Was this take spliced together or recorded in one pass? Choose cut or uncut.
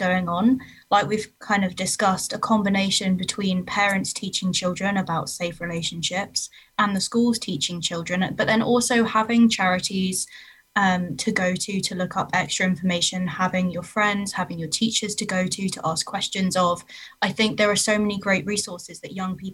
uncut